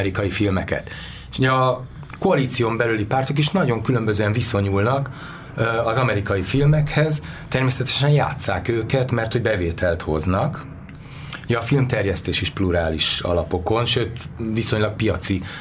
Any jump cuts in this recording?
no; 0 cuts

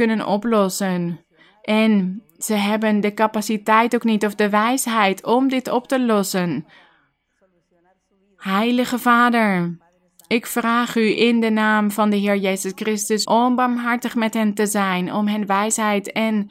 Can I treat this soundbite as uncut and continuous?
no; 1 cut; at 13.2 s

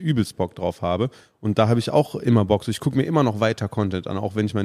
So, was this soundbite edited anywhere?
no; 0 cuts

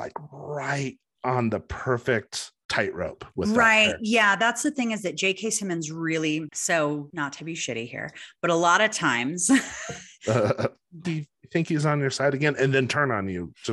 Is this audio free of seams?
no; 1 cut; at 11.0 s

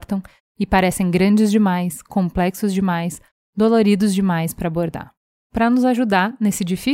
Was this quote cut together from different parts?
yes; 1 cut; at 5.3 s

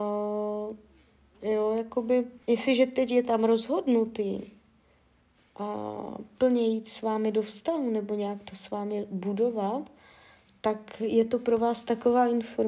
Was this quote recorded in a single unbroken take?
no; 1 cut; at 2.4 s

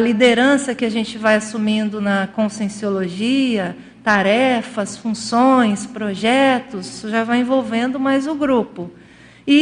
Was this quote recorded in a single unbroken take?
yes; 0 cuts

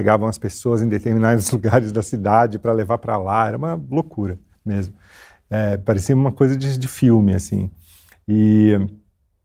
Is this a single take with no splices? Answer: yes; 0 cuts

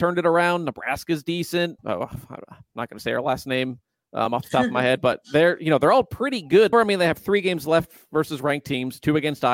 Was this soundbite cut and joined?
yes; 2 cuts; at 1.8 s, 6.7 s

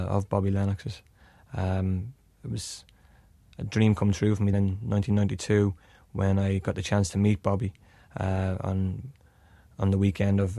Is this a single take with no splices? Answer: no; 1 cut; at 4.5 s

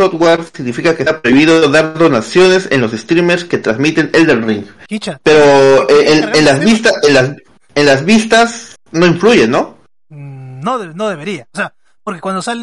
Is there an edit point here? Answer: no; 0 cuts

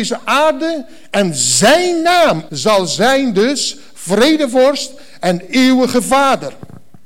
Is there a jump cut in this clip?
yes; 1 cut; at 2.5 s

